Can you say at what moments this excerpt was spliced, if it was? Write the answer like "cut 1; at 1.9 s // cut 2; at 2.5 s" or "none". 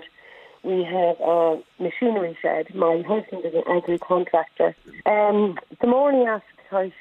cut 1; at 5.0 s